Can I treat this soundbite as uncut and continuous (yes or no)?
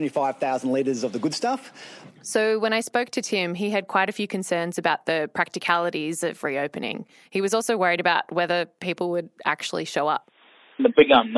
no